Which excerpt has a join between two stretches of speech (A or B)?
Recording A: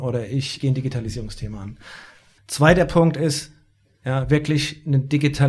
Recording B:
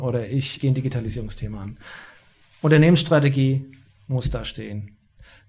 A